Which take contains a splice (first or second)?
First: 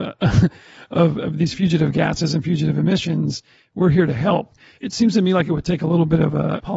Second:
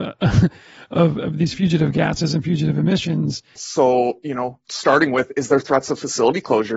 second